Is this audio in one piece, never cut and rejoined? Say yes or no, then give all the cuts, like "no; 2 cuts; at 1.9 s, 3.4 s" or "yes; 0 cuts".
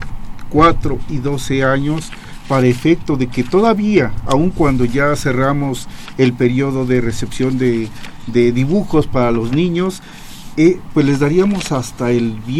yes; 0 cuts